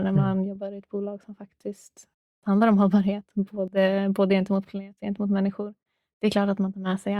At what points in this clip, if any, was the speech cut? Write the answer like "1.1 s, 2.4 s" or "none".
none